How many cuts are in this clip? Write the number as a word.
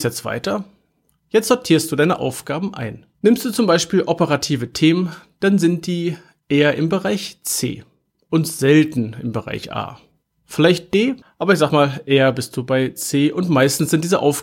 two